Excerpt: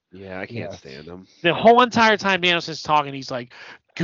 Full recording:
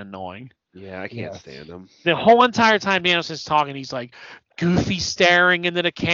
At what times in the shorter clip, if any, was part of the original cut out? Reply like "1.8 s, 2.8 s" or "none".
none